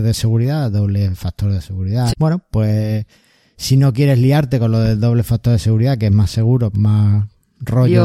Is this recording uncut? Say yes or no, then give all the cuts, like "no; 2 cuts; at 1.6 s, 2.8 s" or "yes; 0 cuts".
no; 2 cuts; at 2.1 s, 6.7 s